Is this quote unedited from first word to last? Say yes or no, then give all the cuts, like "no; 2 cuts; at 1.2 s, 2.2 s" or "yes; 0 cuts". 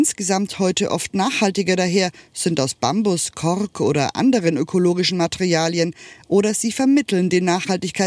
yes; 0 cuts